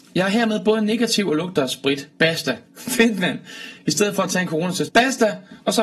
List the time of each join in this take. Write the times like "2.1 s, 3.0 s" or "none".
2.7 s, 4.9 s

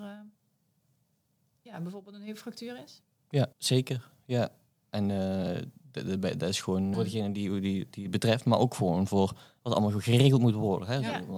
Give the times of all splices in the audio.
3.5 s, 6.9 s

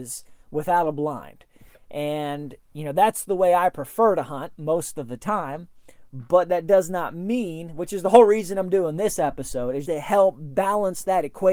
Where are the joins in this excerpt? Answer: 9.8 s

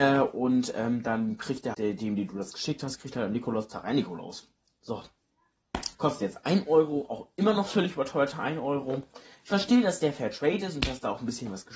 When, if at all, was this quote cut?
1.7 s, 5.9 s

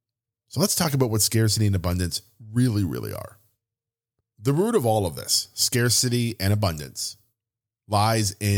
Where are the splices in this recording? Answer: 4.2 s

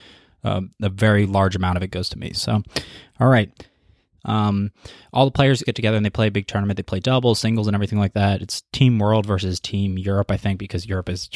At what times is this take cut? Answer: 4.2 s, 5.6 s

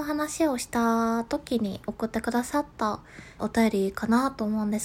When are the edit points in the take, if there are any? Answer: 3.4 s

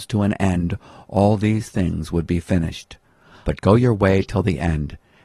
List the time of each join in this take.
3.4 s

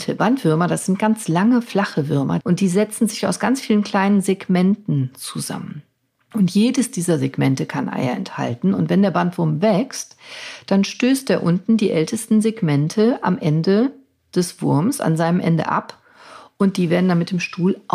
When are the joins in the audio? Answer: 2.4 s

